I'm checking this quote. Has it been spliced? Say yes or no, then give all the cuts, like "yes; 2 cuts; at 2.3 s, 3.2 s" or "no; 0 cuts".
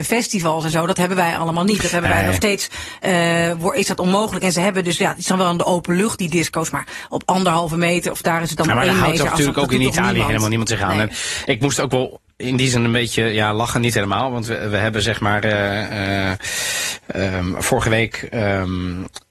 no; 0 cuts